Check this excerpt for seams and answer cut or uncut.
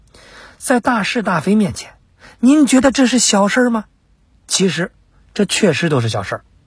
uncut